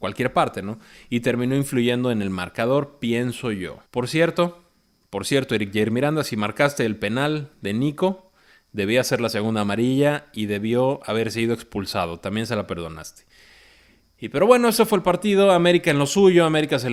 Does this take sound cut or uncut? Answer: cut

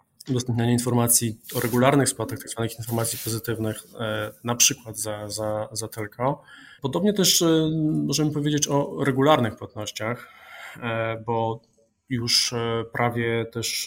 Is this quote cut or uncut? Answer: cut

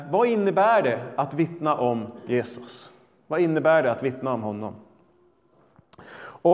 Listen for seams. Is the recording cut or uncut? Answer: uncut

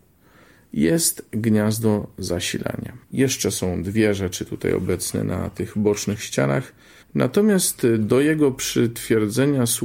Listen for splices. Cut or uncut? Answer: cut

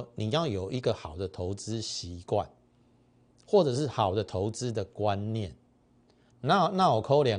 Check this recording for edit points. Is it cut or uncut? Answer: cut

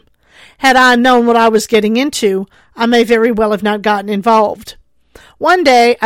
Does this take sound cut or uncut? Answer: uncut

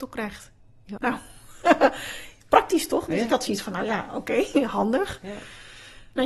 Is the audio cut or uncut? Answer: cut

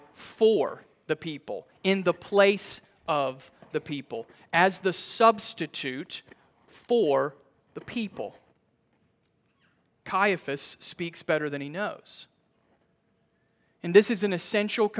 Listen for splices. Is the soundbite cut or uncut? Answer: uncut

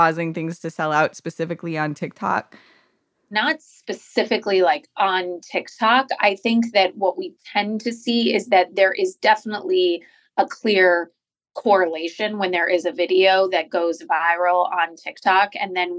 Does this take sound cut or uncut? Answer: uncut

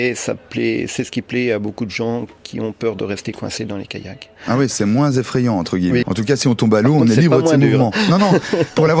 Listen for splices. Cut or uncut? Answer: cut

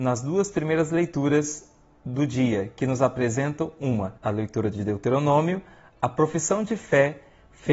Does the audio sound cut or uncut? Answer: cut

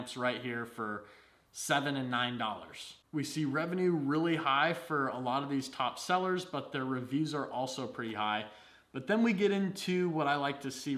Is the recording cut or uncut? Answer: uncut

